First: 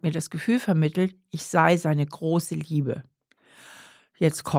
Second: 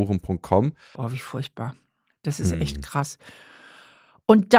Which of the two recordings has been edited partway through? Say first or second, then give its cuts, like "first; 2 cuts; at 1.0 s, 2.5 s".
second; 1 cut; at 0.9 s